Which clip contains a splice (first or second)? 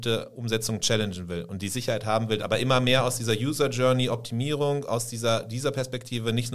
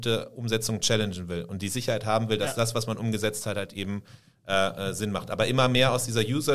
first